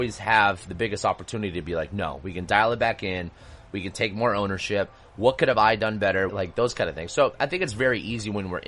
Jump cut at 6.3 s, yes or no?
yes